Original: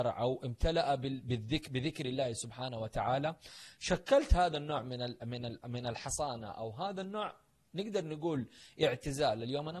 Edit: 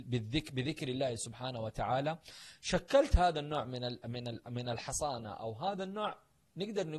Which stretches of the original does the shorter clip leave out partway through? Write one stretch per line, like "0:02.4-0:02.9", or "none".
none